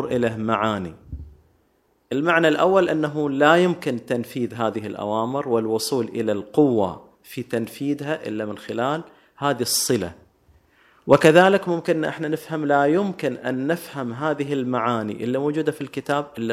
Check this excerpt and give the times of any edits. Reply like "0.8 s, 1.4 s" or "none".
none